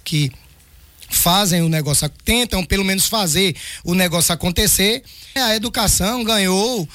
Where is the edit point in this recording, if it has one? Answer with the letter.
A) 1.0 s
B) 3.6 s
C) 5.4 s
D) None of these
C